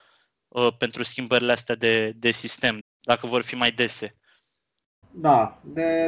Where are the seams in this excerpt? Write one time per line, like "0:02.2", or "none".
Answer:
0:02.8
0:05.0